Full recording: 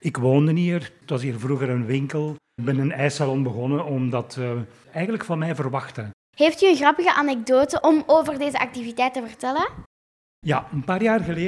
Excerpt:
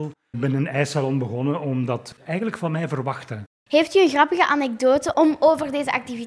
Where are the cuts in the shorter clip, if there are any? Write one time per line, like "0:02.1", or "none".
0:02.1